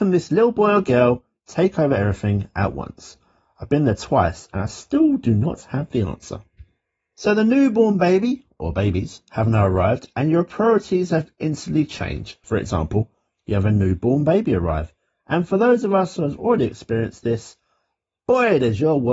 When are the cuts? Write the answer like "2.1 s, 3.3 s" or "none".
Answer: 12.4 s